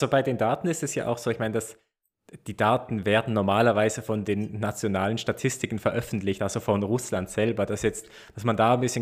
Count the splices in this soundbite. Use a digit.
0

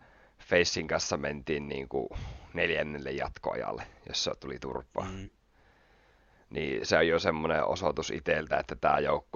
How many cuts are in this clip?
0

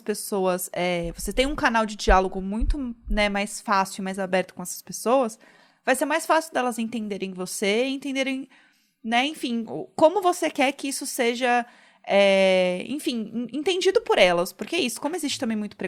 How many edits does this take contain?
0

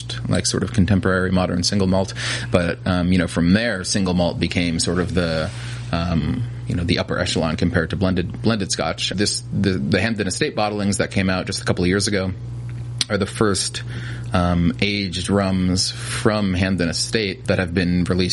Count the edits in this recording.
1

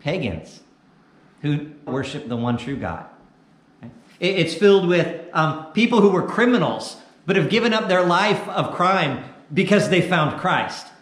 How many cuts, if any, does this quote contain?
1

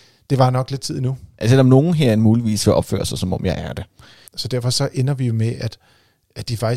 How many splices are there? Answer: 1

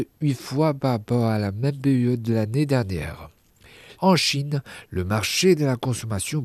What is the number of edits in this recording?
1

